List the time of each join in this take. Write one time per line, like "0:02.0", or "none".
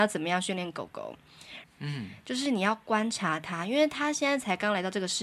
0:01.6